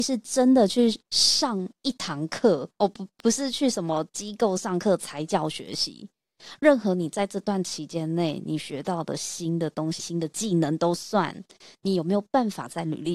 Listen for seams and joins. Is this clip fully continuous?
no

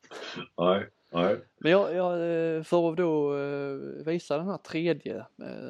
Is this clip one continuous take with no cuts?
yes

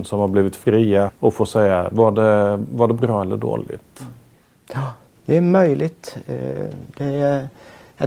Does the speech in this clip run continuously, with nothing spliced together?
no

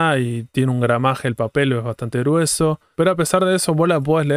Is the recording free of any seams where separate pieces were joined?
no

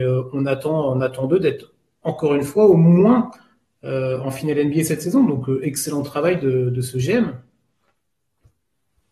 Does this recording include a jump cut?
no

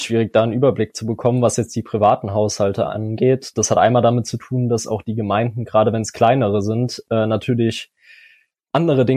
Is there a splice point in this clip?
no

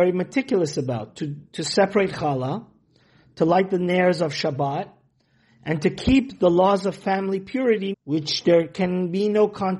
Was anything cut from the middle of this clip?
yes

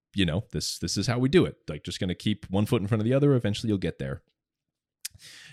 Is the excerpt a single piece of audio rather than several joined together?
yes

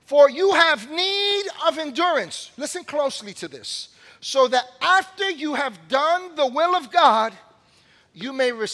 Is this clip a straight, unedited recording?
yes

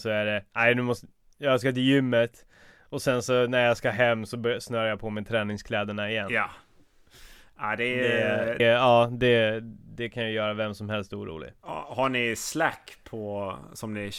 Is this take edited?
yes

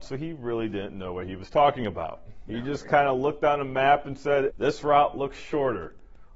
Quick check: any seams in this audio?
yes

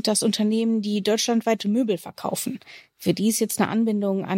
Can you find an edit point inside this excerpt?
no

